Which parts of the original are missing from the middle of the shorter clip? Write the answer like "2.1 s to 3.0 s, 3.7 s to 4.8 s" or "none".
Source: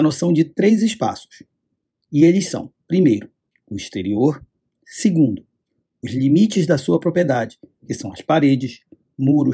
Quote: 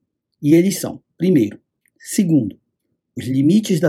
3.6 s to 4.8 s